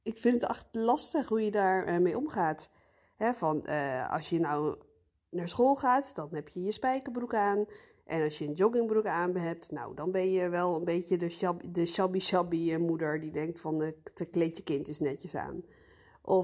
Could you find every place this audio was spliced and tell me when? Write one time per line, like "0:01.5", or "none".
none